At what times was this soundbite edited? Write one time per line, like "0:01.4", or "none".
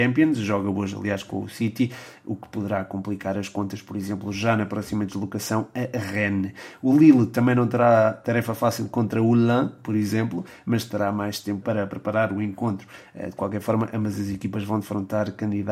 0:11.6

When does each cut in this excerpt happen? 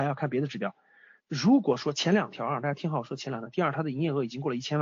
0:01.2
0:03.5

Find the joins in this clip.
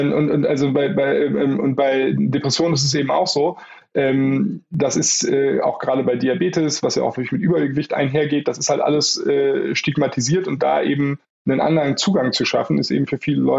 none

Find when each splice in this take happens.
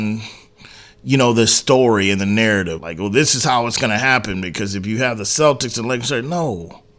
0:02.8

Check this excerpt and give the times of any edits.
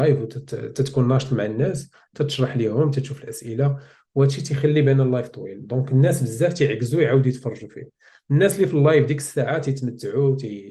none

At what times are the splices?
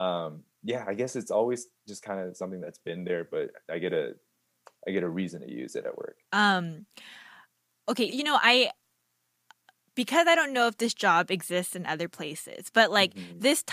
0:06.2
0:08.1

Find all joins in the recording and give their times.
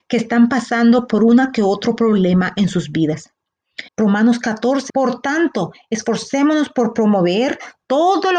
0:03.9
0:04.9

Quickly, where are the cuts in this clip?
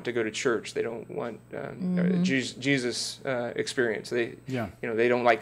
none

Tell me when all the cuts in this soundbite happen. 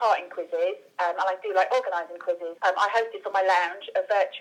0:02.6

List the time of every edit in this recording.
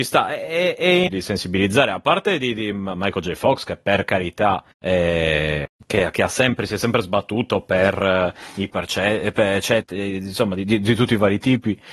0:01.1
0:08.7

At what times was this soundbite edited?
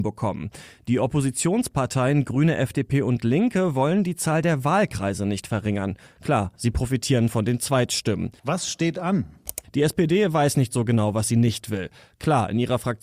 0:08.4
0:09.6

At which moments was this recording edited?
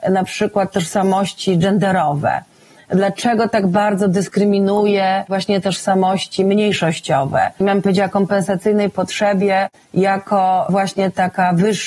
0:07.6

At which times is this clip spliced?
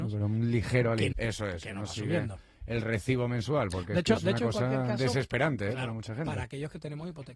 0:01.1

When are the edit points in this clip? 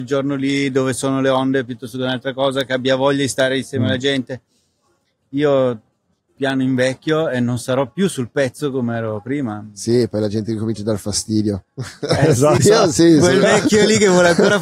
0:06.4
0:12.6

